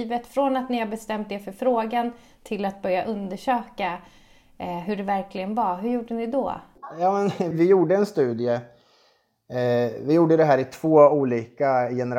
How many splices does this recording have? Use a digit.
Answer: 1